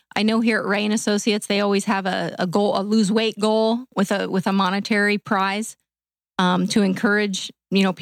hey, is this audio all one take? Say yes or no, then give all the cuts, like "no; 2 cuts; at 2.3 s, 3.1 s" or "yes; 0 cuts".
yes; 0 cuts